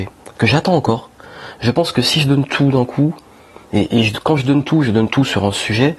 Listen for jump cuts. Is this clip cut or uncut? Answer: uncut